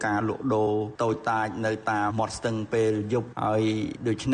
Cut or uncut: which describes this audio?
cut